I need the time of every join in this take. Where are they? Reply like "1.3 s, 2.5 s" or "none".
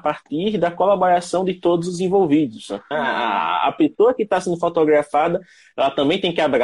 2.9 s